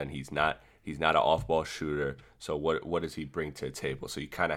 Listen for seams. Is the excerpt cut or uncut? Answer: uncut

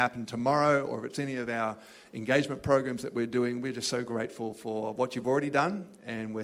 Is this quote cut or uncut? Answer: uncut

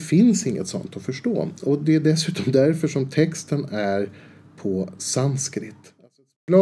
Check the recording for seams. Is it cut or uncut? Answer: uncut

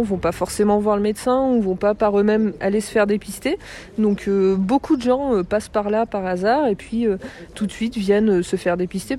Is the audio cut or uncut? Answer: uncut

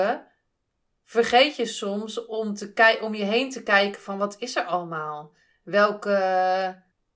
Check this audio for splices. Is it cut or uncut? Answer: uncut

